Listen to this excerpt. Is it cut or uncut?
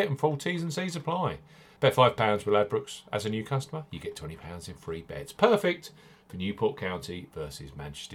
uncut